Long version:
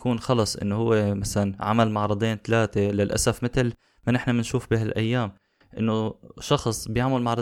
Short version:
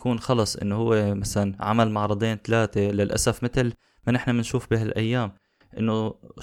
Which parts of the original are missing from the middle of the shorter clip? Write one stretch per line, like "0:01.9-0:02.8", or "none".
none